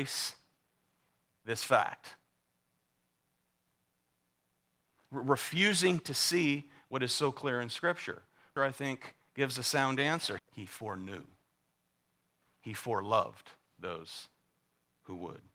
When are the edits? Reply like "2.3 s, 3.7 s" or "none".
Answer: 8.6 s, 10.4 s

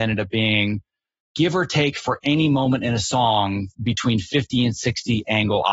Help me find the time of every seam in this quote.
none

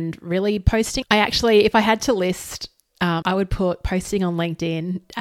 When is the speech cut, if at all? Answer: 1.0 s, 3.2 s

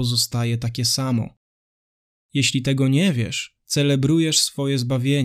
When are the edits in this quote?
3.6 s

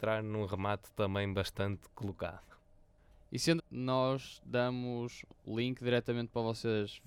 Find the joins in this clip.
3.6 s

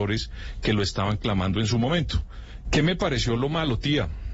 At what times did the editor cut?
2.6 s

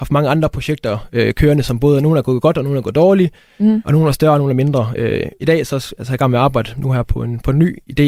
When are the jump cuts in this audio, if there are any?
none

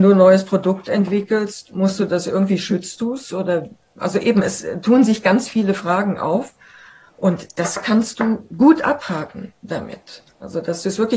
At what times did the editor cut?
none

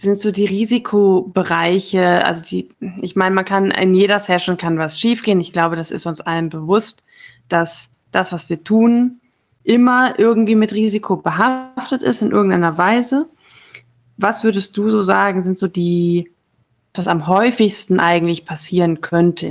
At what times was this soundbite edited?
16.9 s

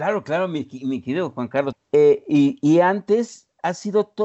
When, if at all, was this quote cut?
1.7 s

